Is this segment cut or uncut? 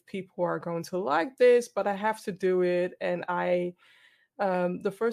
uncut